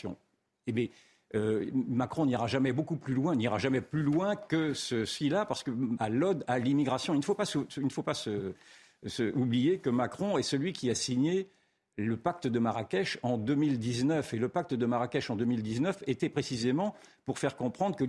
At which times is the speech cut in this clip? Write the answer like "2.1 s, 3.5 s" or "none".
6.0 s